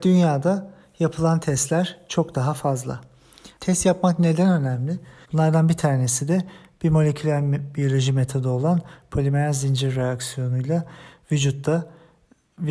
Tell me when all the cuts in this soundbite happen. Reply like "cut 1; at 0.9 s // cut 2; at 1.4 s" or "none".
cut 1; at 3.6 s // cut 2; at 5.2 s